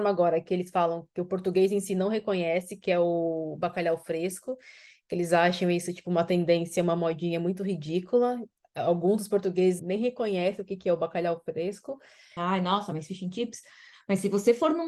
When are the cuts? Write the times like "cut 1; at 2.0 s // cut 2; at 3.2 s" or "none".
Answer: cut 1; at 9.8 s // cut 2; at 12.4 s